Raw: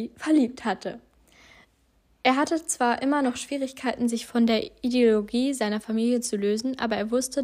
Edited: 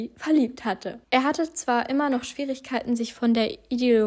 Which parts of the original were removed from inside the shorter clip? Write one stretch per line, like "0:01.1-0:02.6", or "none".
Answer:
0:01.0-0:02.2